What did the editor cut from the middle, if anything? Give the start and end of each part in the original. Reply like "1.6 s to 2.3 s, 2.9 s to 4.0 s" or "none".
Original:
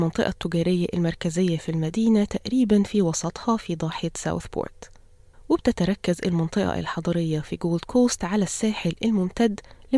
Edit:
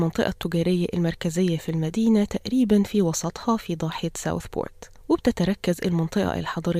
5.0 s to 5.4 s

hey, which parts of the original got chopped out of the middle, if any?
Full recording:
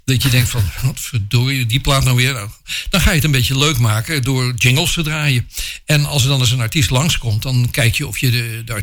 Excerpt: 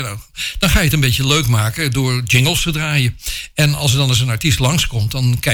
none

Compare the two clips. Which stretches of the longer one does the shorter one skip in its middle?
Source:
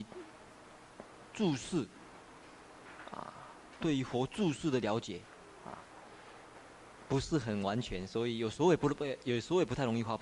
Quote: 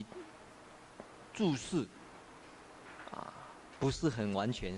3.8 s to 7.1 s

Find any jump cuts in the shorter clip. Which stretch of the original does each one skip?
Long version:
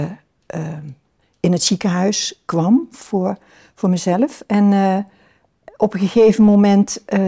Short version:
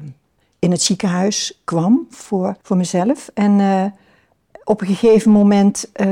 3.4 s to 3.7 s

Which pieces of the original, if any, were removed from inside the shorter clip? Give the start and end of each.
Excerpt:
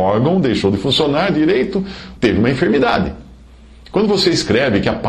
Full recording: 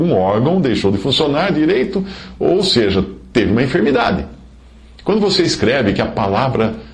2.4 s to 3.3 s

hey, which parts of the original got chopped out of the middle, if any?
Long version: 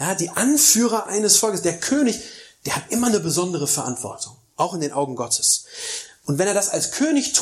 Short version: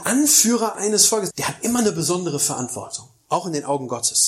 1.6 s to 2.6 s

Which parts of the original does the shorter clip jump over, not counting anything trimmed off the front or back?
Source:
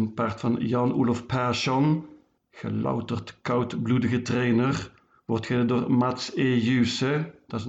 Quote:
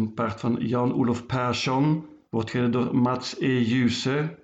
2.3 s to 5.2 s

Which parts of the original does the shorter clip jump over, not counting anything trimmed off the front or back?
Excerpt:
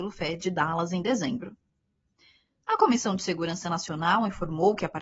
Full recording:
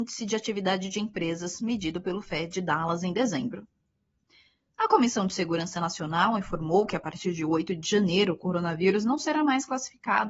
none

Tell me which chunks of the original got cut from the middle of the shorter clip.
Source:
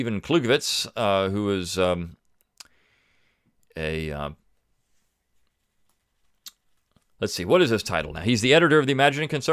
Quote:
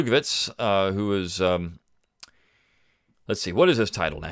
3.5 s to 7.1 s

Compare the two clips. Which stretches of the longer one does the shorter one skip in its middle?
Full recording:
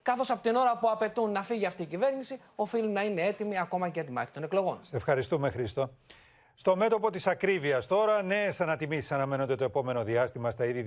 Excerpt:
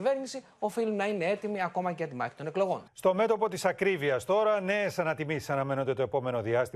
4.8 s to 6.5 s

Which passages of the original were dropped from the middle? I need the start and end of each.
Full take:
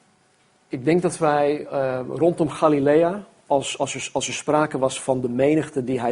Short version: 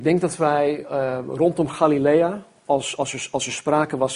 none

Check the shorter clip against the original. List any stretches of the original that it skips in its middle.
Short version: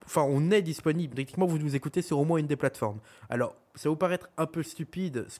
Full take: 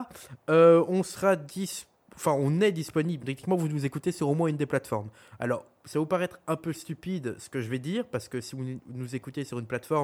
none

